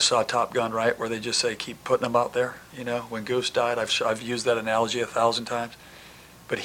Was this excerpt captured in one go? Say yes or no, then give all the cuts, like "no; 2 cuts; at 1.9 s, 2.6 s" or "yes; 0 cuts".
no; 1 cut; at 2.7 s